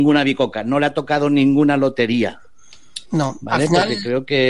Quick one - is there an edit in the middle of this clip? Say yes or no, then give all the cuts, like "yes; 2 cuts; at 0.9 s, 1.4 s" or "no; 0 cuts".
no; 0 cuts